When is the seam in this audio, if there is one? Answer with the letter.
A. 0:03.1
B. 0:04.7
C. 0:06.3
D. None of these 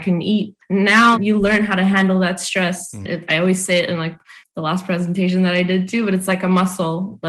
A